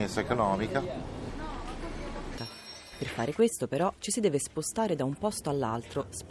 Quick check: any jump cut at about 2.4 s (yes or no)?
yes